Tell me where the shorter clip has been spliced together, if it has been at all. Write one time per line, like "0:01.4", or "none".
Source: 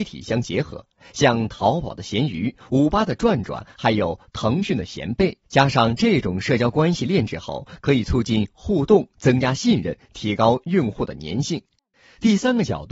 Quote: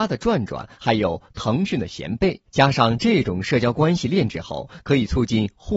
none